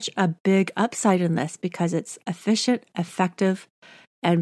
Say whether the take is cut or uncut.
uncut